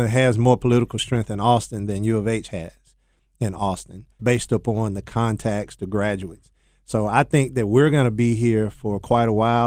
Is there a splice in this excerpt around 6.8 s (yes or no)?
no